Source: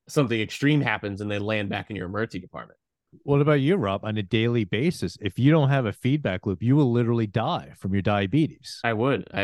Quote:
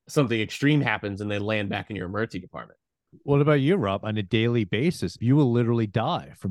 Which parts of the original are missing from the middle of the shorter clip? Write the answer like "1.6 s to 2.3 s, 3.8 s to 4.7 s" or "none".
5.2 s to 6.6 s